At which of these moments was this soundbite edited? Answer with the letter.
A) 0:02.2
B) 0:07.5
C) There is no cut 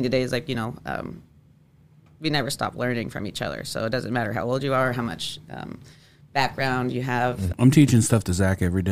B